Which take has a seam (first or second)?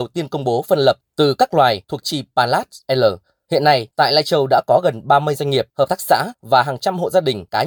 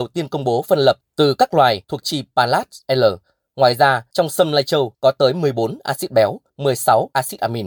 first